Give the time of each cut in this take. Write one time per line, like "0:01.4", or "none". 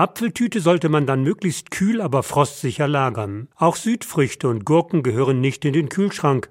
0:03.5